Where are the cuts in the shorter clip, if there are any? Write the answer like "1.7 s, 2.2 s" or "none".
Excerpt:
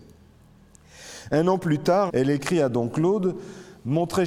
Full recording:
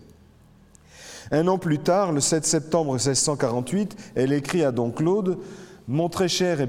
2.1 s